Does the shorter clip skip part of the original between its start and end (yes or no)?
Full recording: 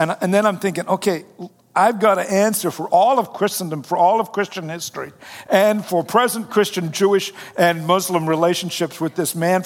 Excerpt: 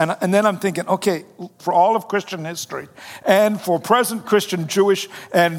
yes